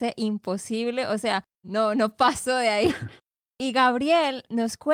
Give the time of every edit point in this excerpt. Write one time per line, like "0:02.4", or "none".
0:01.6

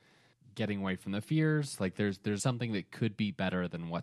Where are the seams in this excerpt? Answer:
0:02.4

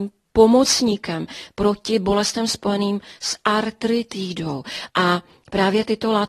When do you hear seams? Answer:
0:04.9

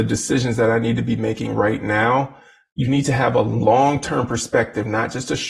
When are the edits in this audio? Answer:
none

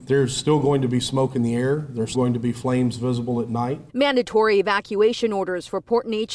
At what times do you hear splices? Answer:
0:02.1
0:03.9

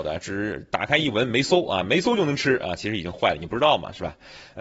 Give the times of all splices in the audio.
none

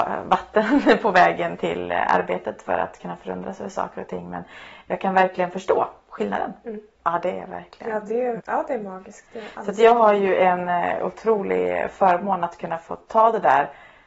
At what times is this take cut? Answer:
0:07.0
0:08.4

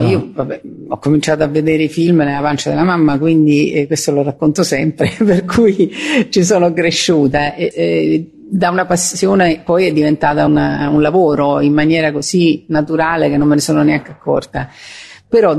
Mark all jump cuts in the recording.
0:07.7
0:10.5

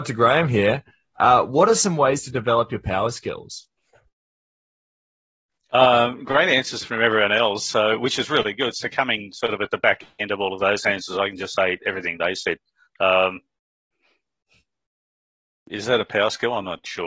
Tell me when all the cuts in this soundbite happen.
none

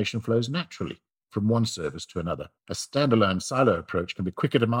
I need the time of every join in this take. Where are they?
0:02.6

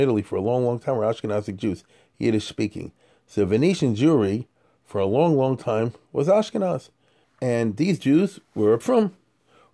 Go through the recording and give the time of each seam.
0:07.2
0:08.8

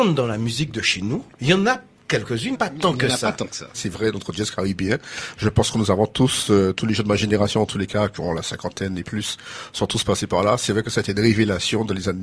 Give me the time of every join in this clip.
0:01.3
0:02.5
0:03.7

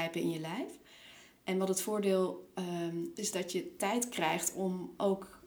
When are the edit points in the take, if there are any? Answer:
0:03.2

